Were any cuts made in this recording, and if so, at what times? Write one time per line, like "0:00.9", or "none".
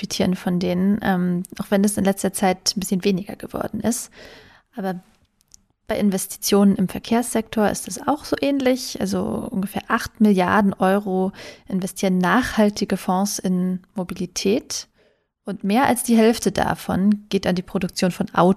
none